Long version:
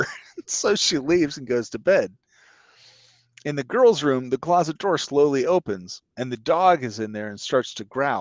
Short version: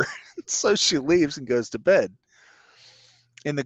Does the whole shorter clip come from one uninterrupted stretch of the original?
yes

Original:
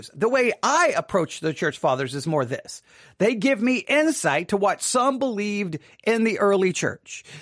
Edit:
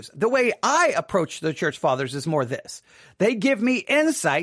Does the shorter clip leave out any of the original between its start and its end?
no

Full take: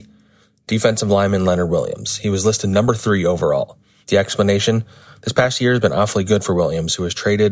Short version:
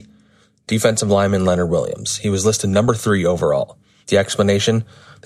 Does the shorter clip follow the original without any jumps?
yes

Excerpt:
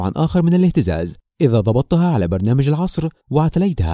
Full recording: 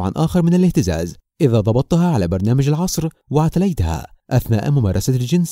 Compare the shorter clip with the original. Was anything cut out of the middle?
no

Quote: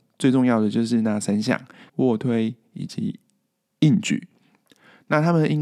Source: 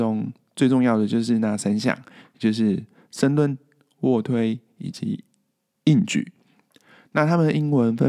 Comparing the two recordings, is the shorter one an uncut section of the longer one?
no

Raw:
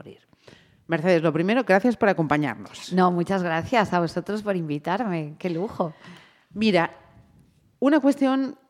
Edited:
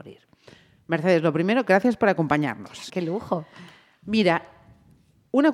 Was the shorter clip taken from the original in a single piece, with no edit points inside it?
no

